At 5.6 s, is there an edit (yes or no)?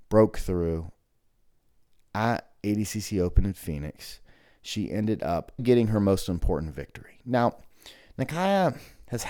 yes